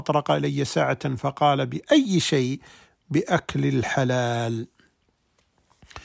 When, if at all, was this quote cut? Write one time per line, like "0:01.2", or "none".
none

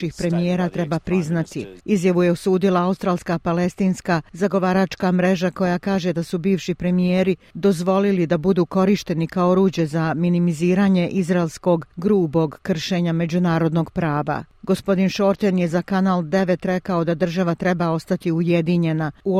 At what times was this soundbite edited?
0:01.8

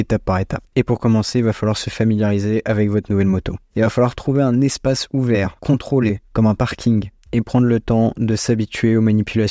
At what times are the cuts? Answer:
none

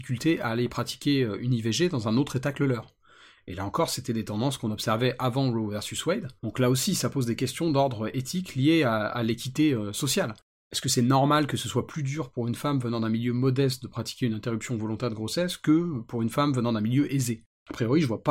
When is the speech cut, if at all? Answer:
0:06.4

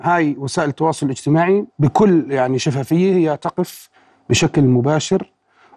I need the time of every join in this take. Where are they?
0:01.7

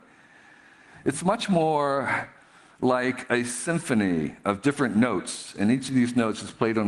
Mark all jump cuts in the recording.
none

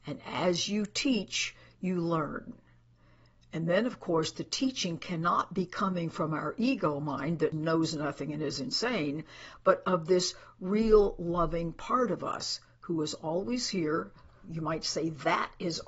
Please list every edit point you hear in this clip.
none

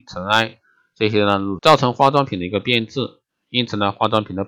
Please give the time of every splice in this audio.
0:01.6

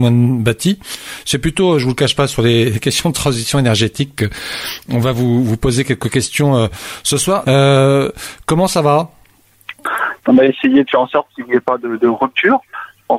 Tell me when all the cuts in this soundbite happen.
0:07.4
0:10.2

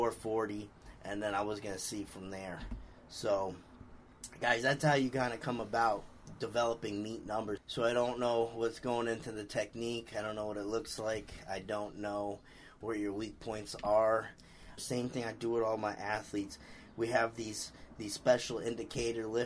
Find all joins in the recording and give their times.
0:07.6
0:14.8

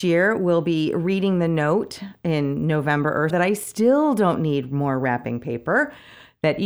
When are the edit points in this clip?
0:03.3

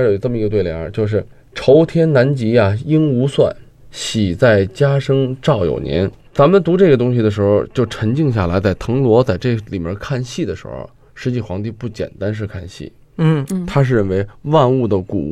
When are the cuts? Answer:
none

